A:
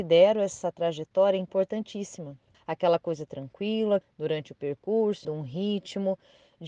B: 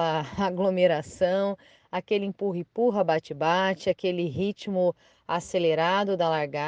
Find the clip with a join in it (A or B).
A